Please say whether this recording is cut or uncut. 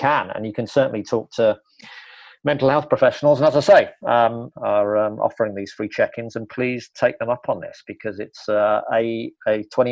cut